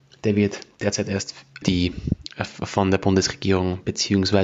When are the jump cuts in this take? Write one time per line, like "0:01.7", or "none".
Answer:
0:01.6

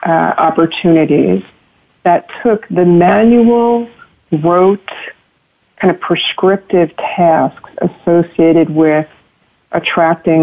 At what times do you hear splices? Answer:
none

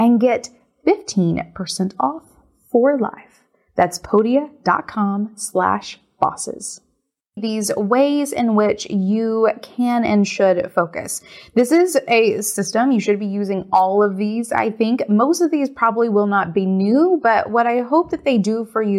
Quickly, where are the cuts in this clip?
0:07.4

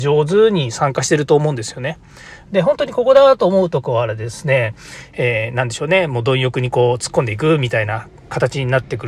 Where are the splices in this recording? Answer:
0:02.5

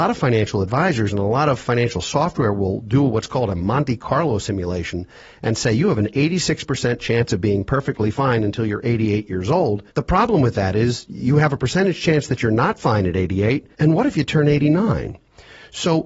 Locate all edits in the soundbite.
0:09.9
0:13.7

